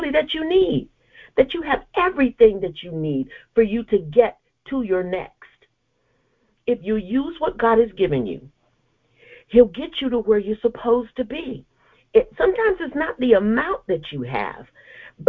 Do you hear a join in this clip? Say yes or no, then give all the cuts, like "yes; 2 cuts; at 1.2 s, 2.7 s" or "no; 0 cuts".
no; 0 cuts